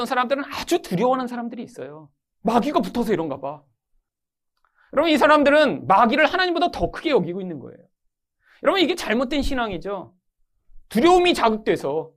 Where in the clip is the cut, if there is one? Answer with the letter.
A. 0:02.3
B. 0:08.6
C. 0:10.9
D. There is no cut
A